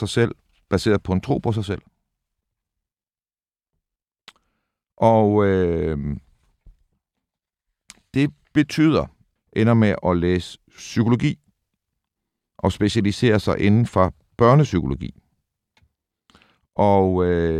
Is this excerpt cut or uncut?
cut